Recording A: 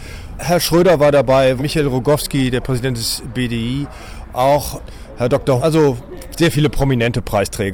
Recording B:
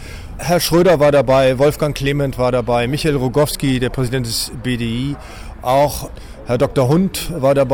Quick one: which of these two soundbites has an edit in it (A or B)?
A